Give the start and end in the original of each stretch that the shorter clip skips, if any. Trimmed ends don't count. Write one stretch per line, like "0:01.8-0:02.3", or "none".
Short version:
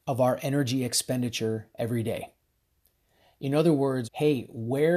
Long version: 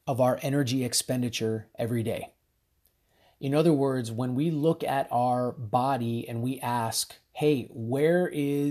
0:04.0-0:07.3